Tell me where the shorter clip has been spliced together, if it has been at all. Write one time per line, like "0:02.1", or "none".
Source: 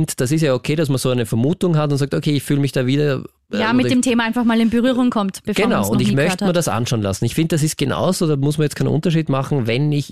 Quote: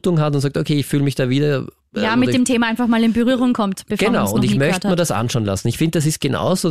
none